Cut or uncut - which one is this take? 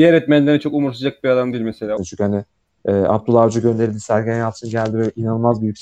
cut